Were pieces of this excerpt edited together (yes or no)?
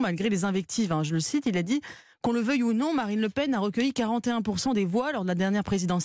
no